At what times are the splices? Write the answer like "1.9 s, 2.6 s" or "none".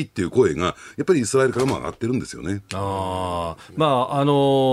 none